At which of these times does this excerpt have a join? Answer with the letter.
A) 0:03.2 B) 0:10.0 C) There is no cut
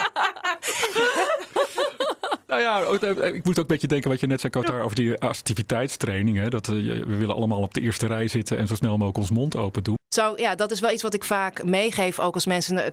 B